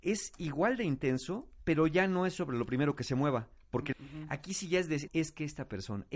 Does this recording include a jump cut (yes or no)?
yes